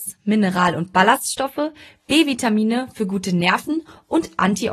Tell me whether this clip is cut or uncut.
uncut